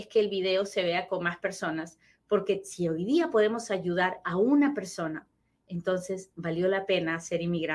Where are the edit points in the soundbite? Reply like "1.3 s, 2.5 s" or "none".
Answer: none